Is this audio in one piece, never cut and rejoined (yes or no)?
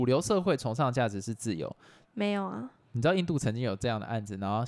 no